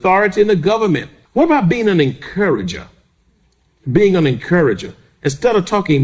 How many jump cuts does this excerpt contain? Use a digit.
1